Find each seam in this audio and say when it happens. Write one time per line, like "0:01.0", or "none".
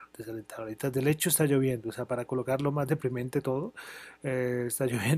0:02.1